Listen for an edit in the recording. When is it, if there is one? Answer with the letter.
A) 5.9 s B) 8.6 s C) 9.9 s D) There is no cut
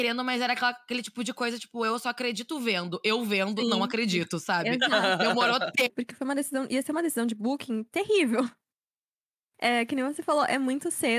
A